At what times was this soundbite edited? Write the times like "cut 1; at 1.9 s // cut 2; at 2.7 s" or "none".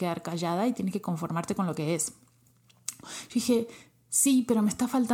cut 1; at 3.0 s